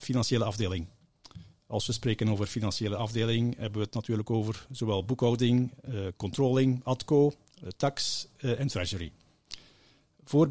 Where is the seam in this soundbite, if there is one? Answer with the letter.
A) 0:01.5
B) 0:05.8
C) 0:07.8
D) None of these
D